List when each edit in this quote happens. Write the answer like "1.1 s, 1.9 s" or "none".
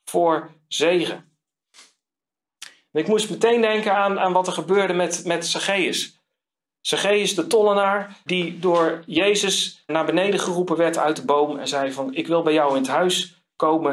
8.3 s, 9.9 s